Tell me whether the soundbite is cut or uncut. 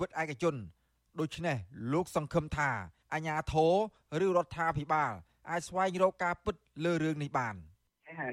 uncut